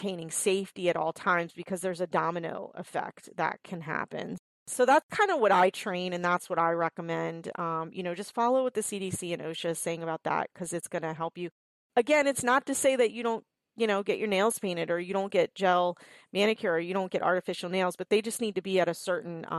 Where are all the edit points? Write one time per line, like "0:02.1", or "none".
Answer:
none